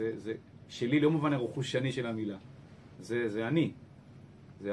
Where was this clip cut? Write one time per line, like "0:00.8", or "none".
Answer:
0:03.0